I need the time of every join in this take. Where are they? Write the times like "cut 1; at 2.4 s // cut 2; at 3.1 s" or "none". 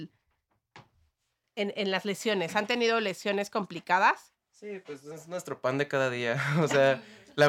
none